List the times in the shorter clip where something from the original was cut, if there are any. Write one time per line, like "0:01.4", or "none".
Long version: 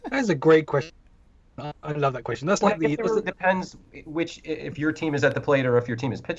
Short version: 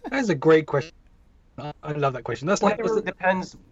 0:02.8